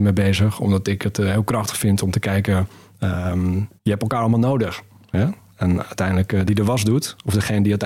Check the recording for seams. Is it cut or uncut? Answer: cut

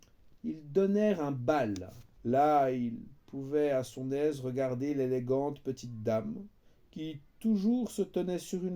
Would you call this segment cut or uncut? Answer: cut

